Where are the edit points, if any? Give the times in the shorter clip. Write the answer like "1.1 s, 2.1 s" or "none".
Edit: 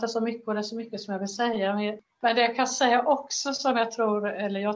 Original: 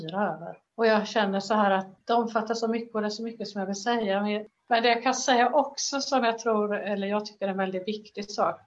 none